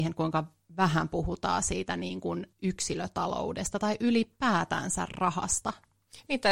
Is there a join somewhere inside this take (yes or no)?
yes